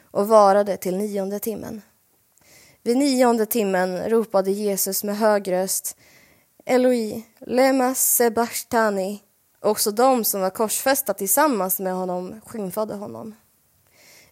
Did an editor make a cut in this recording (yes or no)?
yes